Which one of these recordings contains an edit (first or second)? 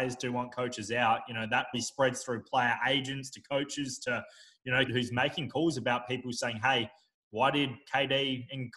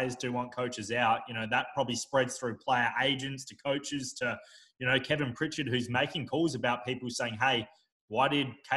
first